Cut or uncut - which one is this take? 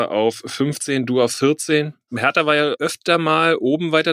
uncut